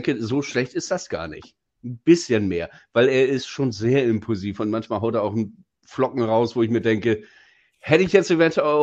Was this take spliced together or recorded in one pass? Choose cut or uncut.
cut